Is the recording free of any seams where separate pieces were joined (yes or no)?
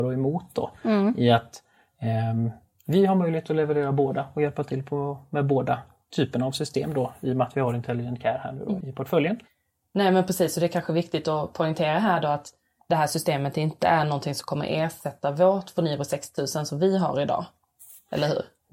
no